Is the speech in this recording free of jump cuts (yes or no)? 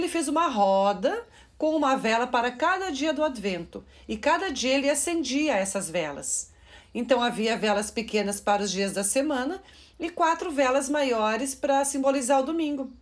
yes